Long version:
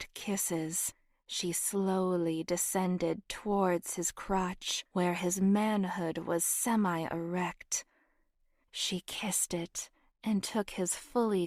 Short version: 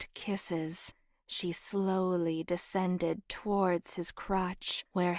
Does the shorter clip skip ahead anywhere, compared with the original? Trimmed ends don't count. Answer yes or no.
no